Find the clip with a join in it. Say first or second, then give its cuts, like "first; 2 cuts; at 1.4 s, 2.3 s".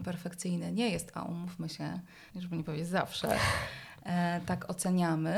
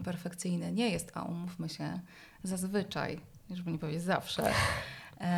first; 1 cut; at 2.3 s